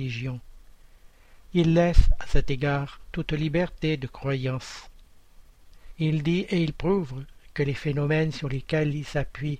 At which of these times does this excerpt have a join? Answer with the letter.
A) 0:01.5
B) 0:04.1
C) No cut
A